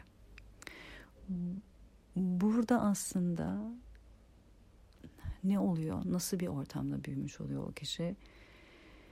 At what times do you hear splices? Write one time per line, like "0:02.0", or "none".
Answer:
none